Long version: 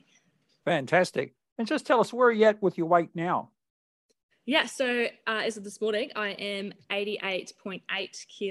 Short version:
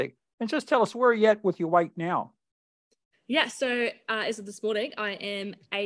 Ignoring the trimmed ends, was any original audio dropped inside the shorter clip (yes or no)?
no